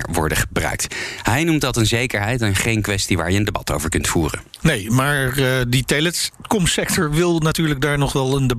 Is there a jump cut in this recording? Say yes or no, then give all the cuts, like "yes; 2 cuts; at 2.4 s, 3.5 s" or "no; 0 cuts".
no; 0 cuts